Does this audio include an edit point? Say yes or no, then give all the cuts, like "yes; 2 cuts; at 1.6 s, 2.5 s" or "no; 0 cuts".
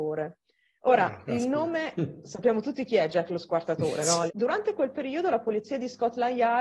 yes; 1 cut; at 4.3 s